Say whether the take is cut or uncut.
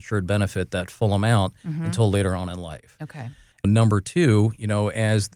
cut